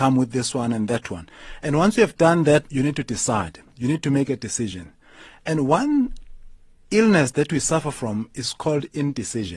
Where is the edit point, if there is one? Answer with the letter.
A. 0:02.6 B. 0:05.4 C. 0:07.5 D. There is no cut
A